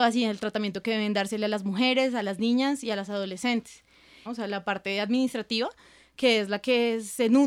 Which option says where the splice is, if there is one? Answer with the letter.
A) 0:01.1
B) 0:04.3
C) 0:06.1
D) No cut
B